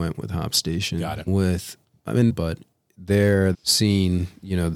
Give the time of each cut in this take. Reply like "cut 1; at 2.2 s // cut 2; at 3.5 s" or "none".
cut 1; at 2.3 s // cut 2; at 3.5 s

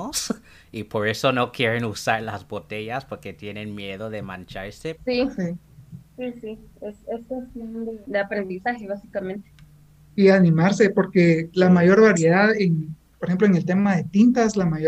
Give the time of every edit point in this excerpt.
cut 1; at 5.0 s

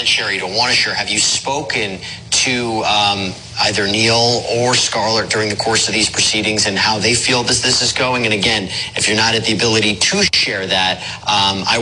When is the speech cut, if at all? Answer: none

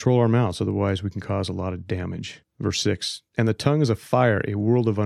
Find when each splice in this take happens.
none

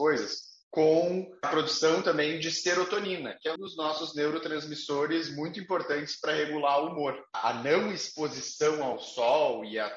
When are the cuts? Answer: cut 1; at 3.6 s

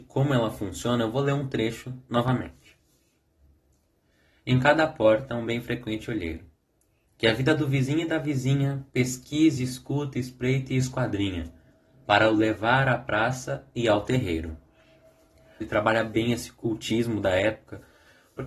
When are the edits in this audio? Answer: cut 1; at 15.6 s

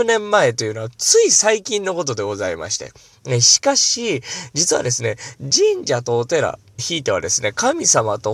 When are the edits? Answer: cut 1; at 3.1 s // cut 2; at 6.8 s

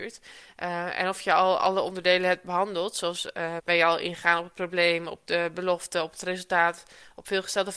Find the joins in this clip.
cut 1; at 3.6 s

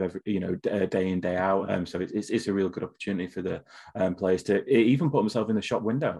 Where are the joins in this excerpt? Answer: cut 1; at 1.6 s

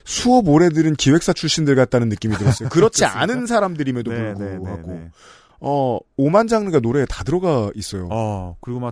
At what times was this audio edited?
none

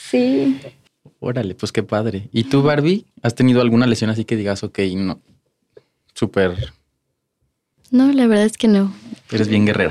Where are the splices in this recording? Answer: none

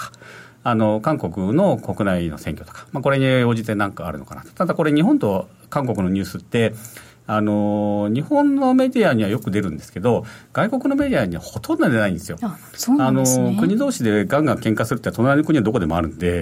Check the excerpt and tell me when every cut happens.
none

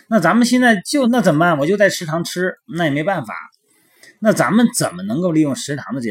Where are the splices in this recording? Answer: cut 1; at 1.0 s

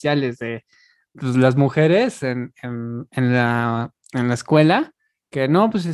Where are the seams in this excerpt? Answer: none

